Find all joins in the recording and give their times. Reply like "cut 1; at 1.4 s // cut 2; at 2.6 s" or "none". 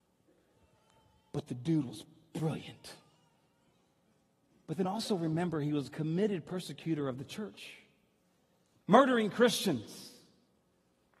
none